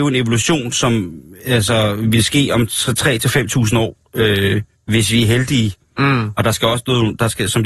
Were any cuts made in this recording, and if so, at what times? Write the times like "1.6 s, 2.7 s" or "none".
none